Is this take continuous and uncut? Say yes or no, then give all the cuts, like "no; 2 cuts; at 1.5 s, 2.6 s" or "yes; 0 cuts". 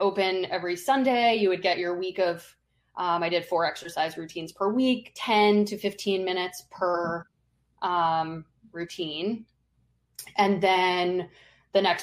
yes; 0 cuts